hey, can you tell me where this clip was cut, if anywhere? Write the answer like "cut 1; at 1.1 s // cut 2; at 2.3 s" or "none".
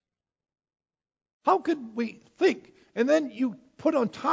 none